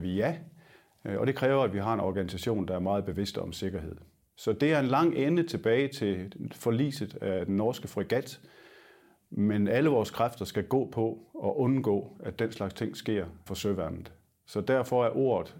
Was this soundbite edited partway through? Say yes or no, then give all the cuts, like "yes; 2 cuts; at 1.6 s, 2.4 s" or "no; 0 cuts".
no; 0 cuts